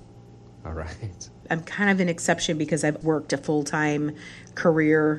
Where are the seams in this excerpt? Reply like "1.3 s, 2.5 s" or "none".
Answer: 1.4 s, 3.0 s